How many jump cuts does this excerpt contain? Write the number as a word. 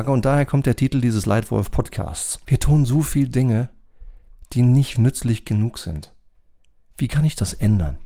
two